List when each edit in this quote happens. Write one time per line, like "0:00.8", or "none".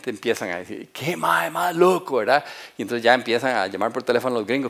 none